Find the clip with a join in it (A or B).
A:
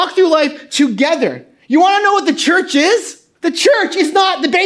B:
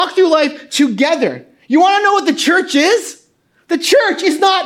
A